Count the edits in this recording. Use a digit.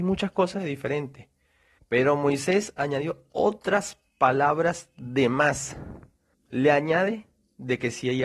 2